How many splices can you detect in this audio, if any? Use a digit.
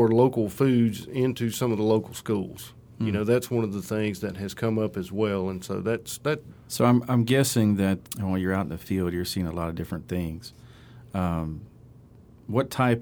2